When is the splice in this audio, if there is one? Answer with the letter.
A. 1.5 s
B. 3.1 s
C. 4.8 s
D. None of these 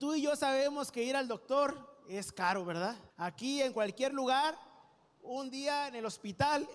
B